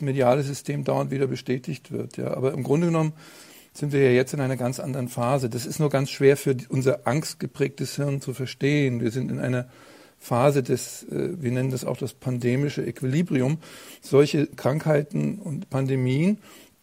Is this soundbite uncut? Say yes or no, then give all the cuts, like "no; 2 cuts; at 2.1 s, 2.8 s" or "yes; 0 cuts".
yes; 0 cuts